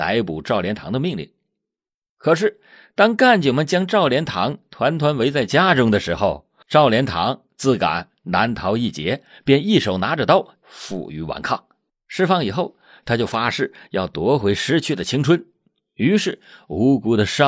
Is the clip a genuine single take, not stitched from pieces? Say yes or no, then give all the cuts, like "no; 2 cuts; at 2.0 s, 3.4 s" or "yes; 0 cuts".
no; 2 cuts; at 10.6 s, 11.9 s